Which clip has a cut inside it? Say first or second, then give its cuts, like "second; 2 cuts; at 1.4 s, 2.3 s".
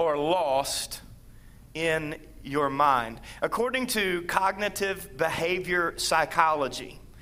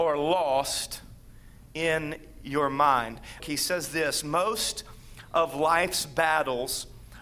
second; 1 cut; at 3.4 s